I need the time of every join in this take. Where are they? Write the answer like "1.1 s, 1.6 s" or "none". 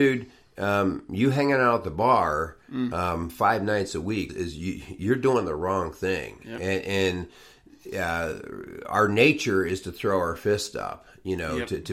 4.3 s